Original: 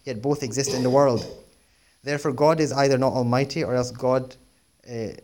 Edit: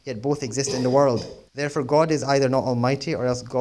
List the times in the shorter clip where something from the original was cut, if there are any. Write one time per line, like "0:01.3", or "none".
0:01.5